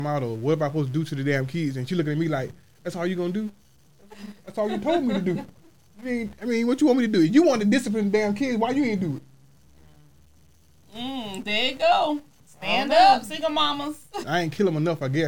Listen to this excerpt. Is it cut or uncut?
cut